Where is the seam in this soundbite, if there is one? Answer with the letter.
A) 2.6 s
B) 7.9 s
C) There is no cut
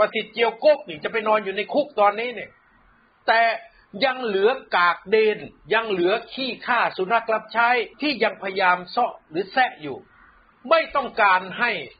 B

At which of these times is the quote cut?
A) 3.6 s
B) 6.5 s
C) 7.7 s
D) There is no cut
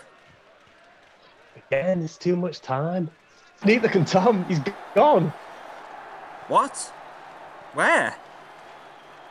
A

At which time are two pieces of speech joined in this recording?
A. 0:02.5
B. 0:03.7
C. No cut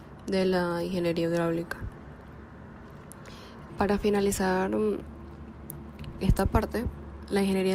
B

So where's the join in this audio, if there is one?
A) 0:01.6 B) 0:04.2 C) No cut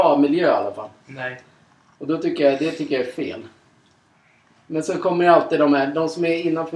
C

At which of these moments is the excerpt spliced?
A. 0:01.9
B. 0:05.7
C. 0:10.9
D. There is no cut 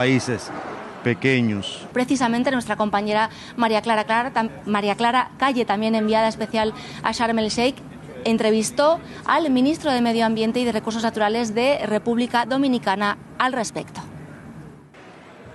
A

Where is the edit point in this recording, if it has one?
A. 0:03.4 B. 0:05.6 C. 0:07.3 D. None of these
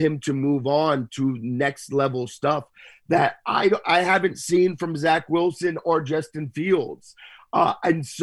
D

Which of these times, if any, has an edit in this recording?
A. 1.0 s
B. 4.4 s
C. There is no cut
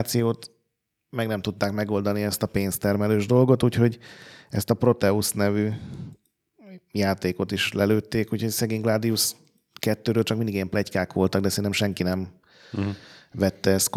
C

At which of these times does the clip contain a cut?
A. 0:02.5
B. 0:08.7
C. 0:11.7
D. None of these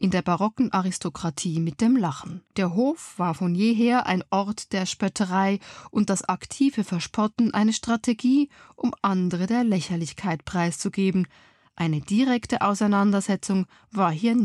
A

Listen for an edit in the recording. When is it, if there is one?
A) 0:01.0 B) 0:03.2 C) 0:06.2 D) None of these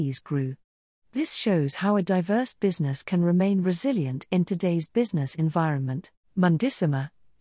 C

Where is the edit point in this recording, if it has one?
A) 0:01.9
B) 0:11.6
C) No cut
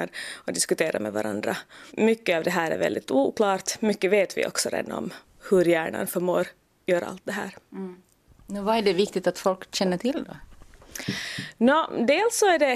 A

